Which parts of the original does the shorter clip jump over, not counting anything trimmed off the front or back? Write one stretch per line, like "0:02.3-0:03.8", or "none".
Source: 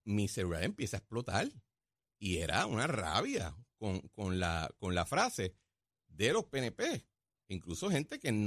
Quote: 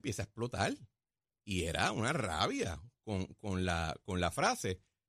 none